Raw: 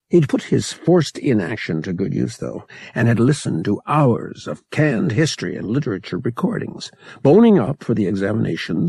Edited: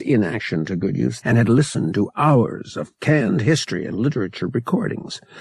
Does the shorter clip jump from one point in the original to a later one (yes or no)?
yes